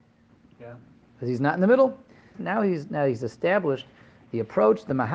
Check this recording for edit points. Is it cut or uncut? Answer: cut